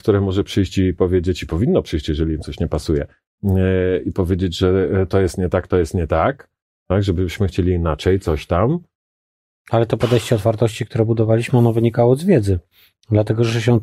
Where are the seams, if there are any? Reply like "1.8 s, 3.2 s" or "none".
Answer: none